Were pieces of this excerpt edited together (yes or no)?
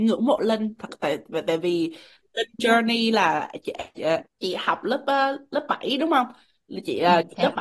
yes